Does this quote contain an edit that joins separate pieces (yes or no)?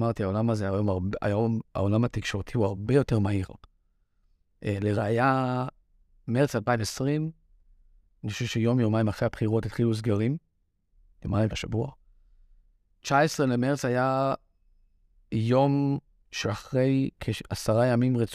yes